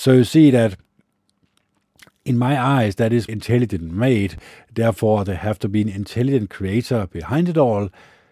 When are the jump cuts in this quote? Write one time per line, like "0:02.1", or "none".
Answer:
0:03.3